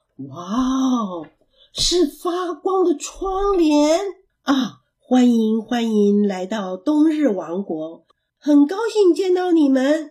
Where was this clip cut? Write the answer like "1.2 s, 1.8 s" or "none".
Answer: 4.3 s, 8.3 s